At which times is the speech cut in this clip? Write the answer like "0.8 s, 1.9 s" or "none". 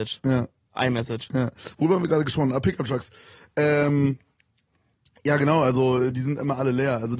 none